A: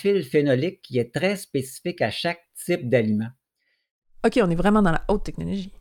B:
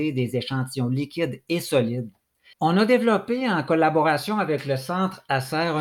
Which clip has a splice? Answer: B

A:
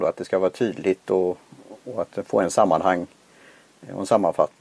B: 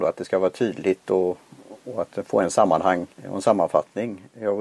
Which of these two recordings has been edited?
B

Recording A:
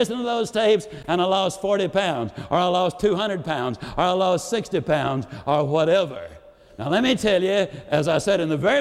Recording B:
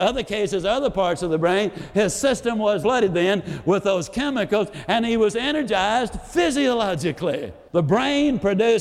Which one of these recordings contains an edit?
B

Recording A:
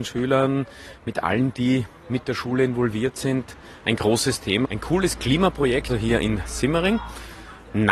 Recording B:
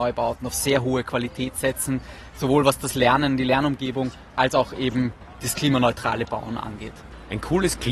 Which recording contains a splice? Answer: A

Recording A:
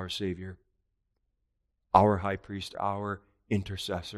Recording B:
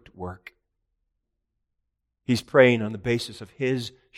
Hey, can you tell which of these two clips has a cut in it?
A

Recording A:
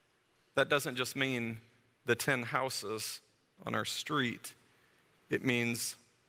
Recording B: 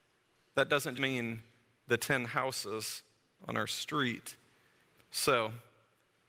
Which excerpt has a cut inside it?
B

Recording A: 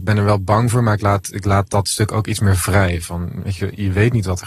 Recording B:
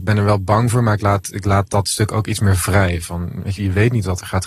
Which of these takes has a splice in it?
B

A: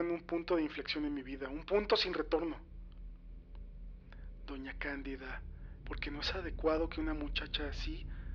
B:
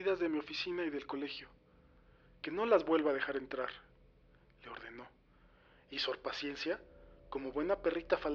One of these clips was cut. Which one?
A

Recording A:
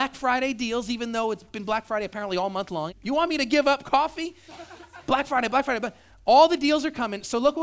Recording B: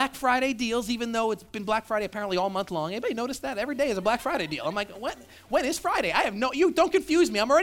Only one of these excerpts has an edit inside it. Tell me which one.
A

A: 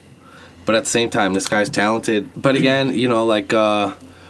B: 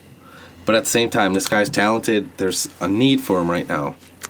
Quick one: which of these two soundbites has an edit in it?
A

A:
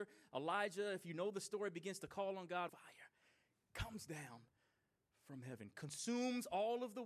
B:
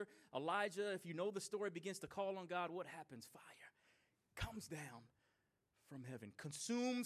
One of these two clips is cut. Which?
A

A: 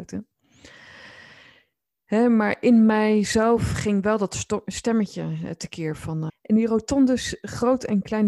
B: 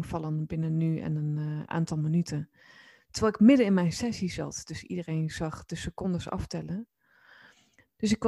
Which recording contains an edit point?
A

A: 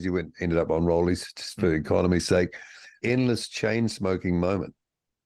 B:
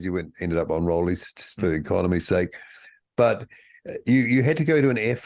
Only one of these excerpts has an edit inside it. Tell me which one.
A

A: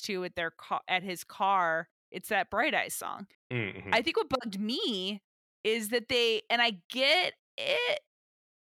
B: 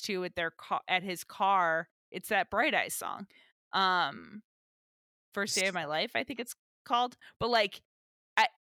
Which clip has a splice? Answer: A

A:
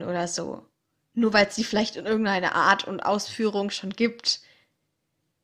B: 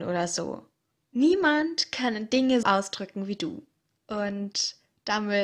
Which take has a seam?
B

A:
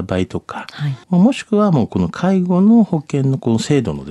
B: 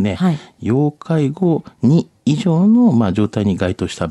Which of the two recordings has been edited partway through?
A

